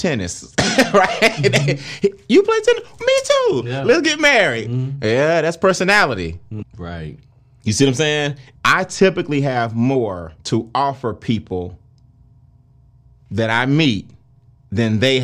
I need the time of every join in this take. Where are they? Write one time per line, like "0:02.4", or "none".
0:06.6
0:08.6
0:10.4